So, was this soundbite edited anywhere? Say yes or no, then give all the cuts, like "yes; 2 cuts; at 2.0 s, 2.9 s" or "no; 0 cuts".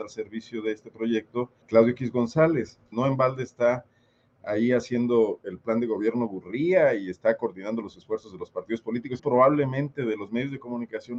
yes; 3 cuts; at 1.6 s, 2.9 s, 9.2 s